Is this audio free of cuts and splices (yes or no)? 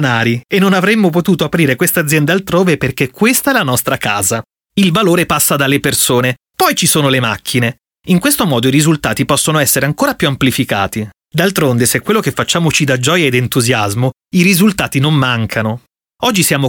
no